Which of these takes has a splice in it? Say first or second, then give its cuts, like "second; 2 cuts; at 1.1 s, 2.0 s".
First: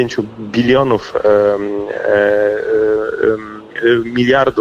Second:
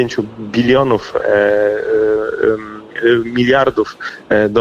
second; 1 cut; at 1.2 s